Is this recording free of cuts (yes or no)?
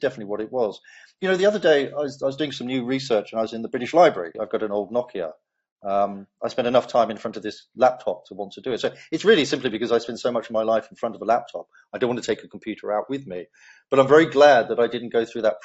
no